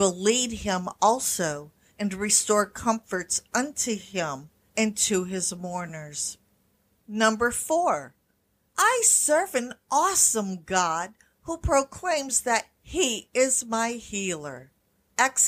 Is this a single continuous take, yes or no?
yes